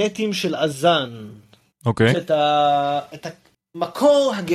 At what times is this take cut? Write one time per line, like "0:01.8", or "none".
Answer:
0:02.1